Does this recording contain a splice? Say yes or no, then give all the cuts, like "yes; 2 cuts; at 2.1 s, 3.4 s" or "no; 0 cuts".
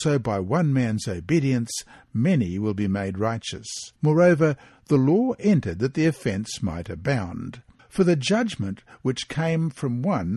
yes; 2 cuts; at 4.0 s, 7.8 s